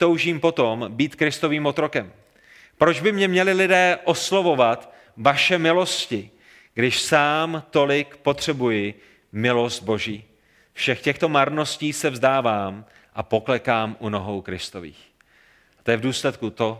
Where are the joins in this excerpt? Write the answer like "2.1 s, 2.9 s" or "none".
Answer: none